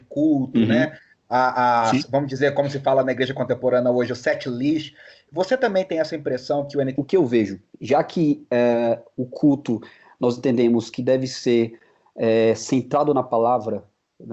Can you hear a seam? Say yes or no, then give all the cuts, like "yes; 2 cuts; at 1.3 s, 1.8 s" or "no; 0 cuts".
yes; 1 cut; at 6.9 s